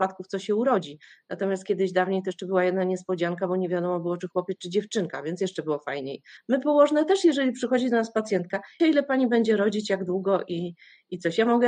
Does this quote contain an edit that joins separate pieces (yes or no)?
yes